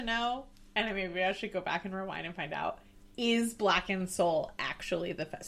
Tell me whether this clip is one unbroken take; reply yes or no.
yes